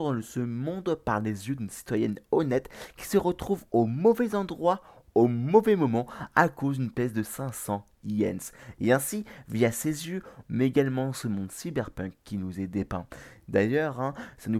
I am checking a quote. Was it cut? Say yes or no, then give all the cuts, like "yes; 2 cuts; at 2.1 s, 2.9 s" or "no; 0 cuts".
yes; 1 cut; at 10.4 s